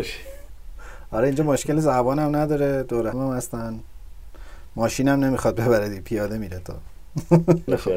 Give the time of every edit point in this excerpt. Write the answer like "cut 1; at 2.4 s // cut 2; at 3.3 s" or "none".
cut 1; at 3.1 s